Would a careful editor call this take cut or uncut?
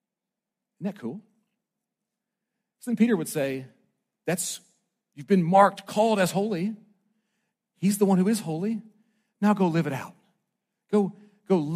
uncut